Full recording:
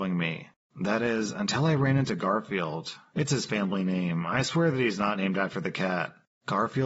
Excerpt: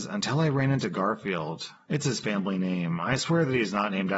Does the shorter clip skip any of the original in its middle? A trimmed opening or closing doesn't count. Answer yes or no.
no